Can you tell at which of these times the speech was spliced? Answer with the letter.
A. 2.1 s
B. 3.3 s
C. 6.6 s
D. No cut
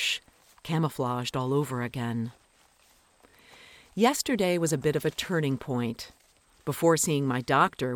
D